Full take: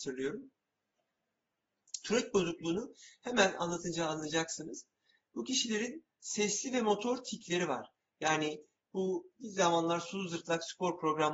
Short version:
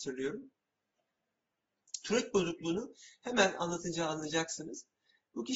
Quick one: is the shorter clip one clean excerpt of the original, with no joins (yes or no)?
yes